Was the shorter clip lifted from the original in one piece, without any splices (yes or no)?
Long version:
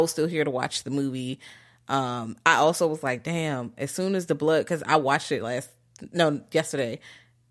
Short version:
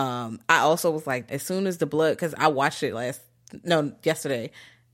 no